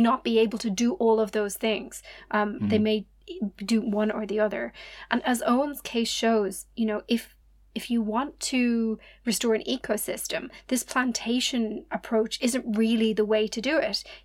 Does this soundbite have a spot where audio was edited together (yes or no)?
no